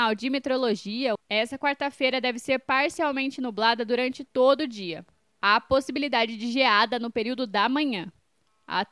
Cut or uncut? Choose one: cut